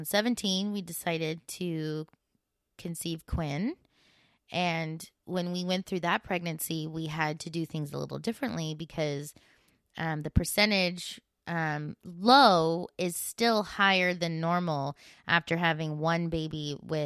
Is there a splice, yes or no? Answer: no